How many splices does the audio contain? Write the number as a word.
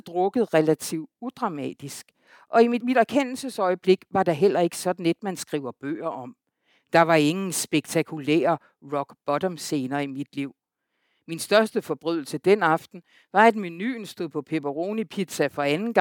one